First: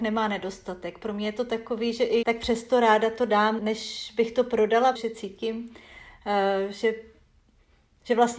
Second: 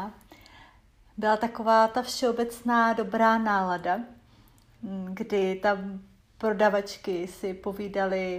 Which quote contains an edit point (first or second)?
first